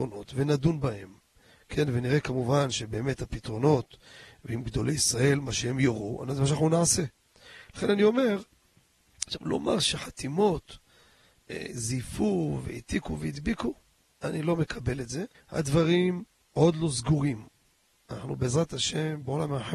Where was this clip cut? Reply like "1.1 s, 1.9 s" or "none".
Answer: 14.0 s, 15.3 s